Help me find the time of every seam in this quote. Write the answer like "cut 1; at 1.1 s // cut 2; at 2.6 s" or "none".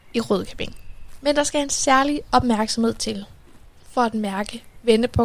cut 1; at 1.2 s // cut 2; at 3.8 s